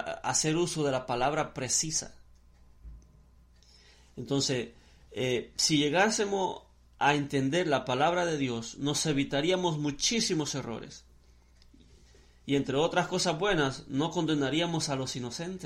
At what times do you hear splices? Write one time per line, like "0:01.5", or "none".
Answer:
none